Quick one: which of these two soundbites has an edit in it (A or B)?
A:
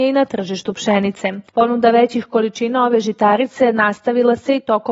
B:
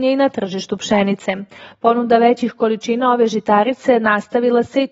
A